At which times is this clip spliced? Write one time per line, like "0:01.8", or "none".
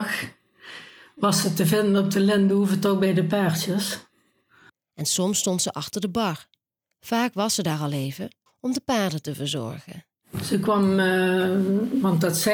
0:08.5

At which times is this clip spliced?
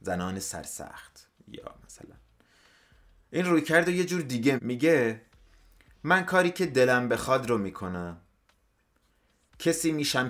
0:04.6

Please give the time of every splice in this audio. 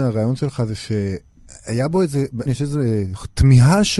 0:02.5

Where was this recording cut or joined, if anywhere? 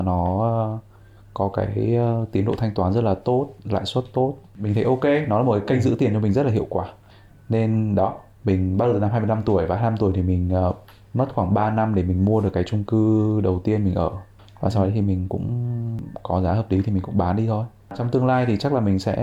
none

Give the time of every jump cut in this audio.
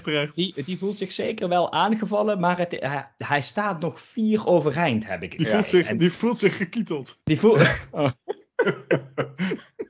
none

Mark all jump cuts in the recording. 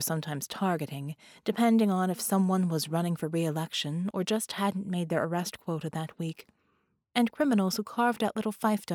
0:04.1

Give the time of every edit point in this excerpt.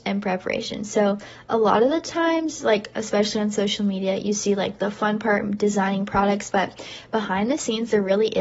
0:06.5

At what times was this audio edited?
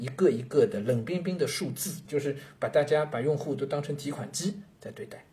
0:02.0

